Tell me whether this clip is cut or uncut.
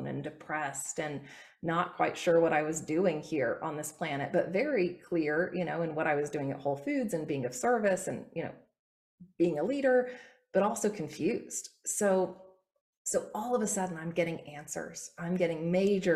uncut